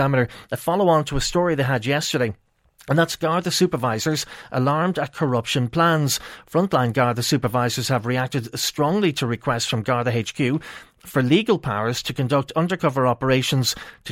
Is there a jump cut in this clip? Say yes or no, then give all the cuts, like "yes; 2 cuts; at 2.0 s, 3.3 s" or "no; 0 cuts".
no; 0 cuts